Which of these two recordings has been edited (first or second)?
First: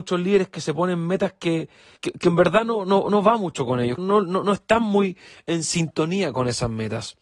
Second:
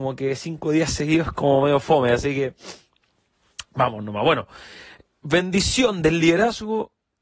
first